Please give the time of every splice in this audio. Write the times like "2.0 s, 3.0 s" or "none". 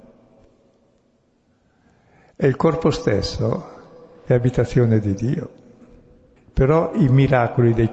6.4 s